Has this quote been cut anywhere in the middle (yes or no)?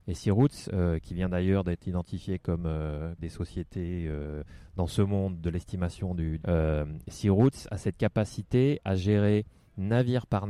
yes